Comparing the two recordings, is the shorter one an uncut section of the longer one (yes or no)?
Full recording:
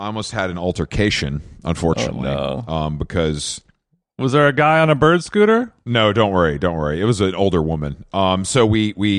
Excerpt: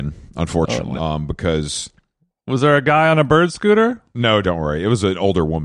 no